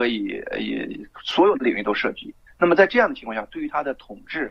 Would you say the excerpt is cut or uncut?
uncut